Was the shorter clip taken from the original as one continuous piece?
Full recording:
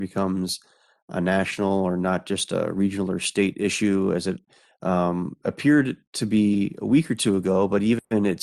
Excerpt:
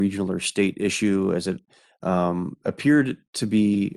yes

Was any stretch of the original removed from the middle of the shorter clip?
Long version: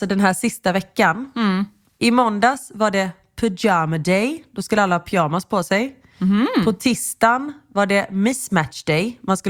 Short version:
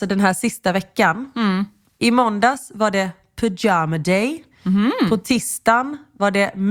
yes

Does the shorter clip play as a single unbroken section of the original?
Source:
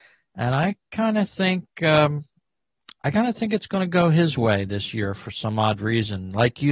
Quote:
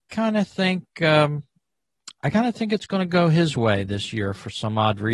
yes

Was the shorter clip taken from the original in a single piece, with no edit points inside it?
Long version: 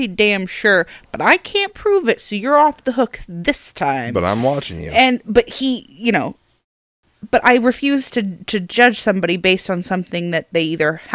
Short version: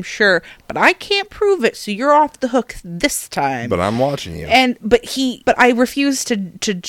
no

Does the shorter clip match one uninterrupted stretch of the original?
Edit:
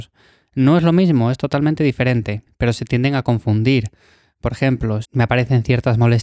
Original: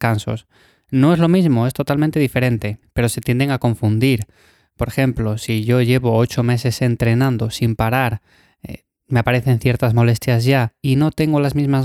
no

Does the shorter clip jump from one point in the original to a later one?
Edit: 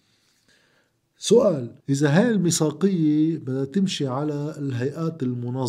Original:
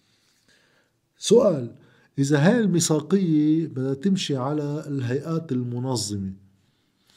yes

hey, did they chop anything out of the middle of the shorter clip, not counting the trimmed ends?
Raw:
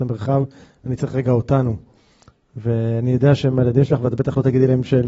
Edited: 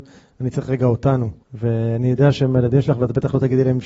yes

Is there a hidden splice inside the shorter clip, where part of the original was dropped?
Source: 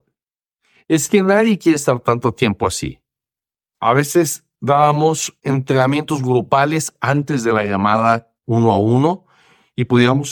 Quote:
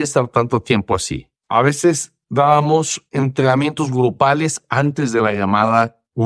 yes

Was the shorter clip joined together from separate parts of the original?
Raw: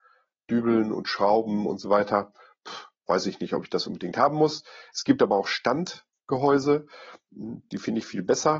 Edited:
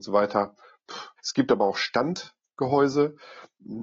yes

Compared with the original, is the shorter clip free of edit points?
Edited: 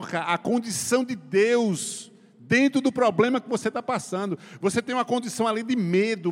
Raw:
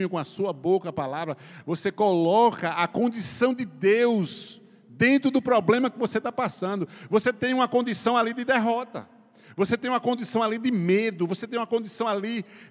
no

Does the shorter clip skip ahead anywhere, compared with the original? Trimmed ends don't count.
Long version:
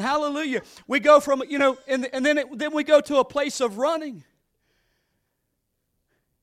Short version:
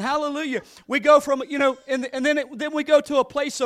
no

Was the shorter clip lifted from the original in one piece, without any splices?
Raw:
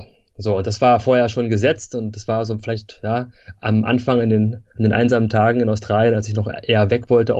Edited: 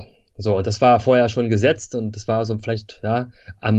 yes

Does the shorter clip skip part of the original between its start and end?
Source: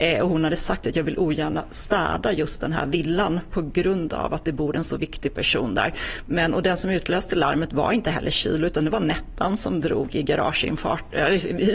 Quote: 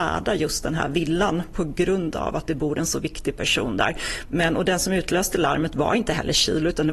no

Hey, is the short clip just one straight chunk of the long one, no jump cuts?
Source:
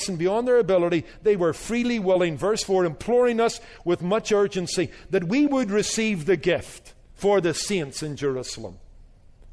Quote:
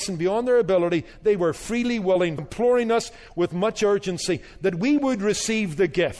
no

